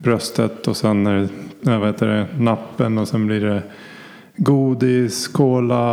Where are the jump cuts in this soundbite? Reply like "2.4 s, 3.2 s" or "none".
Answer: 1.6 s